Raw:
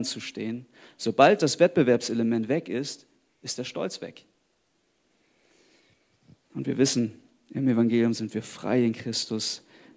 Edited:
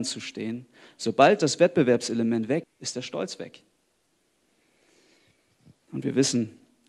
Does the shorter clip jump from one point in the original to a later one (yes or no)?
yes